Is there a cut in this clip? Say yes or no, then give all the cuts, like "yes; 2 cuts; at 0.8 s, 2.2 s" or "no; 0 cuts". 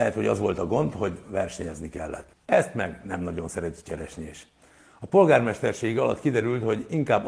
no; 0 cuts